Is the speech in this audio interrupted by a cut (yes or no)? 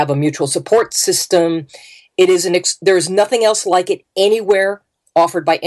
no